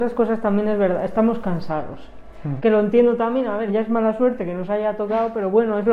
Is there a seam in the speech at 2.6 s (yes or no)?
yes